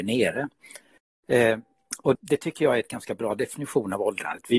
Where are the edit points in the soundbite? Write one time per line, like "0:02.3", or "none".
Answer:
0:02.1